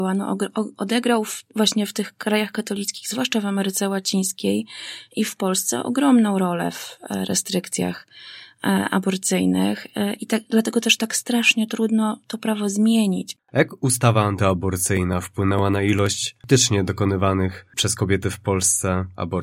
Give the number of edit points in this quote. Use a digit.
1